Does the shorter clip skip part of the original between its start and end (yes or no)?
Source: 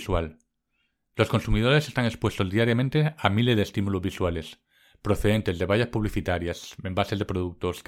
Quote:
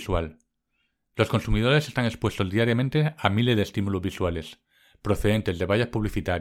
no